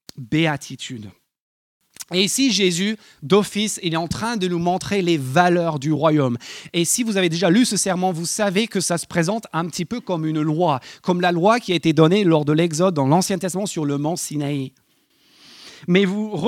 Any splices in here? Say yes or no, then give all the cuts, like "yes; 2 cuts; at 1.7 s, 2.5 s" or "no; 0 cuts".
no; 0 cuts